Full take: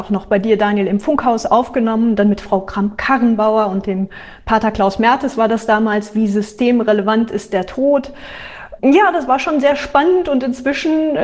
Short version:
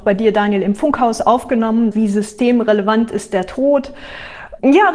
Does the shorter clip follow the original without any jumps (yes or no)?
no